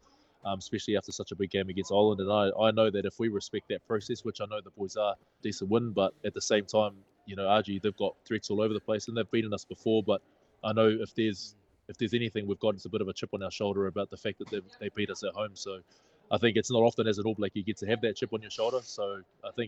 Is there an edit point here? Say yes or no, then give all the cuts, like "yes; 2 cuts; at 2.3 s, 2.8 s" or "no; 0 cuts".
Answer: yes; 1 cut; at 5.4 s